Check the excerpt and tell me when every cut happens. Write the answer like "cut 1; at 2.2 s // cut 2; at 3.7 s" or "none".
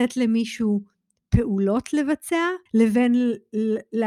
cut 1; at 2.7 s